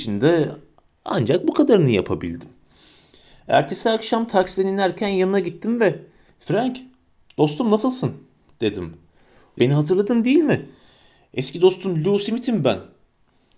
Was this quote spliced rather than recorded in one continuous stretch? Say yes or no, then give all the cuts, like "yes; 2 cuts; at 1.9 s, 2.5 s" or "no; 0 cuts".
yes; 1 cut; at 9.6 s